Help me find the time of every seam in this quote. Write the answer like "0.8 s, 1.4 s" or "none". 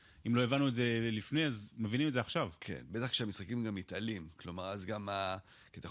none